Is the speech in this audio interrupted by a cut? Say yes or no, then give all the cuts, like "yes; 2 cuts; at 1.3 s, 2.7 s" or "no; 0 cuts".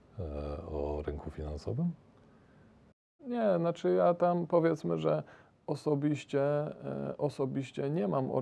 yes; 1 cut; at 3.2 s